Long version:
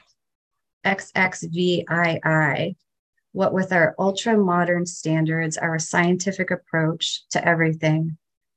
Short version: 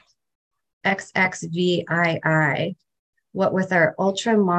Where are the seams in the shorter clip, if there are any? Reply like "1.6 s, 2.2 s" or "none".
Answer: none